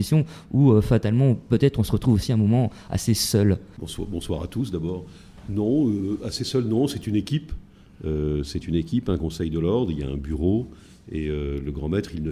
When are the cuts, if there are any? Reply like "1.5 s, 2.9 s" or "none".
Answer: none